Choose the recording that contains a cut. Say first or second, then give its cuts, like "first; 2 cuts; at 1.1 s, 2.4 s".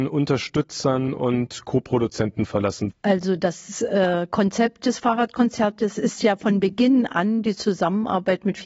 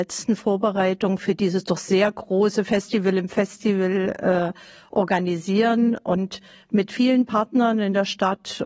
first; 1 cut; at 2.9 s